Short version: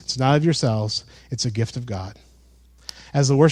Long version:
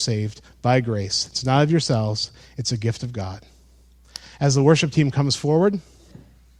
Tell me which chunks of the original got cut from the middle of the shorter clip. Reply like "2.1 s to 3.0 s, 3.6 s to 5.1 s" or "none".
none